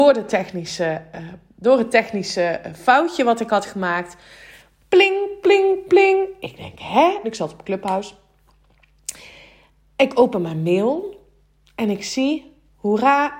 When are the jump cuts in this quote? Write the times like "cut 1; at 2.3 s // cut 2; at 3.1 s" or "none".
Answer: cut 1; at 5.4 s // cut 2; at 7.2 s